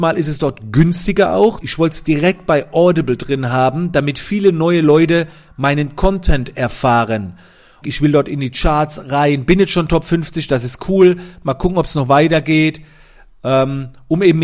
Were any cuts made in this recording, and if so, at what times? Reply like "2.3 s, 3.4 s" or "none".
1.6 s, 7.8 s